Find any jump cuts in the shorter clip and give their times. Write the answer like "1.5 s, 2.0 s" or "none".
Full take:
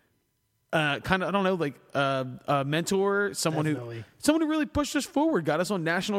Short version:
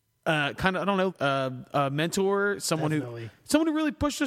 1.1 s